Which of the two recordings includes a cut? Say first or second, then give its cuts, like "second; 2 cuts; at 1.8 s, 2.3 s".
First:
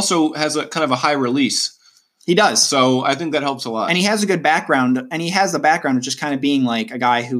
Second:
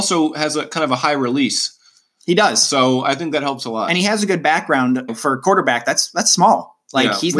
second; 1 cut; at 5.1 s